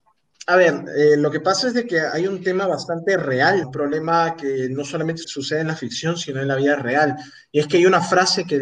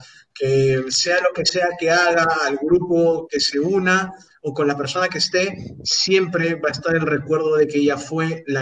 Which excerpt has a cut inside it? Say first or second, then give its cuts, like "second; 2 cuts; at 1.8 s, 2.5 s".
first; 2 cuts; at 3.6 s, 5.2 s